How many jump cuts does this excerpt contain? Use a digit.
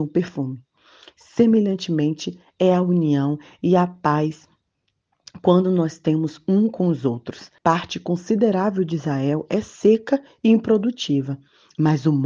1